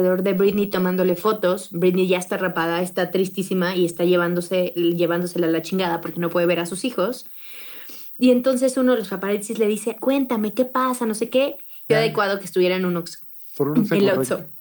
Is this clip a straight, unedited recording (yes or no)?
no